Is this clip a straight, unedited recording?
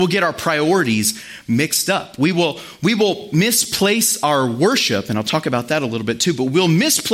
yes; 0 cuts

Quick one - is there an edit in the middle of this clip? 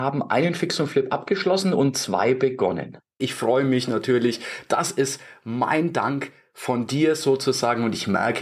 yes; 1 cut; at 3.2 s

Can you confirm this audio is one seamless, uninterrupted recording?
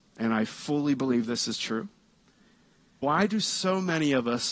no; 1 cut; at 3.0 s

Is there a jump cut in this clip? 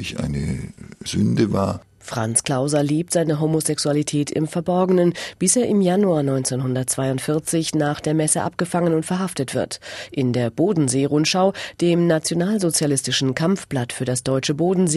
no; 0 cuts

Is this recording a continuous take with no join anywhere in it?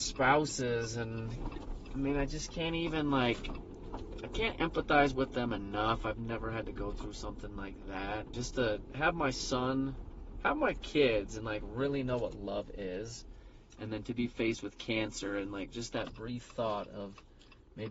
no; 1 cut; at 8.3 s

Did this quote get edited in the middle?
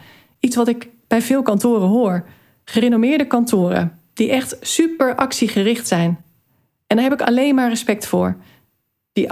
no; 0 cuts

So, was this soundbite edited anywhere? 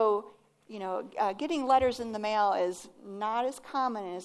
no; 0 cuts

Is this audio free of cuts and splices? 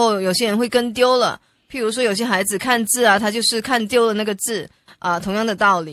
yes; 0 cuts

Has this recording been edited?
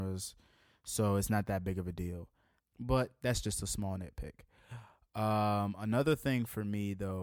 yes; 1 cut; at 2.6 s

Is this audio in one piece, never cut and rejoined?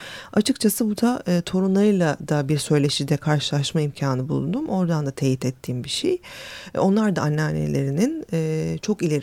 yes; 0 cuts

